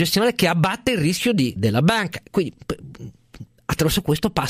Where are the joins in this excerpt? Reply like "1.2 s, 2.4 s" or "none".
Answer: 1.6 s